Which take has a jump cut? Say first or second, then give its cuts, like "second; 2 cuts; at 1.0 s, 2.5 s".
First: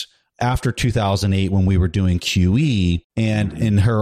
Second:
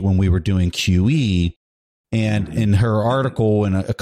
first; 1 cut; at 3.1 s